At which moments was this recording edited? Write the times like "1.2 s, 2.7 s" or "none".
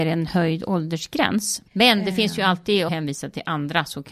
1.7 s, 2.9 s